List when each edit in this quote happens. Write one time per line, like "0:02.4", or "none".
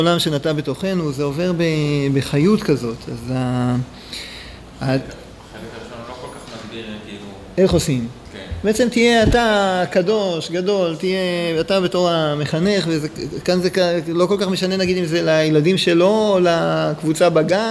none